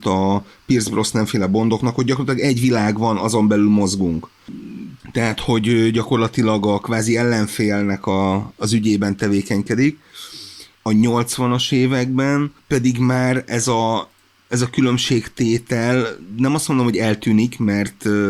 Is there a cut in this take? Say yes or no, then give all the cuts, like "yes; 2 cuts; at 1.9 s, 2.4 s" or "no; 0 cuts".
yes; 2 cuts; at 5.0 s, 10.8 s